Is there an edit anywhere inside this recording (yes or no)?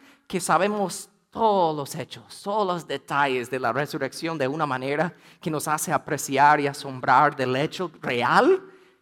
no